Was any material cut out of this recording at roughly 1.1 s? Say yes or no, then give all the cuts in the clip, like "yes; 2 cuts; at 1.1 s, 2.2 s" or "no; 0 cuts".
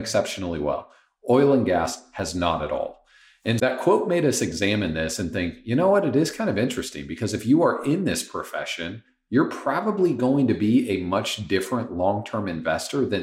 no; 1 cut; at 3.6 s